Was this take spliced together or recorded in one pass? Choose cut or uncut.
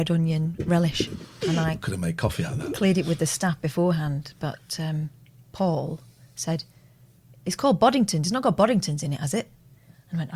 uncut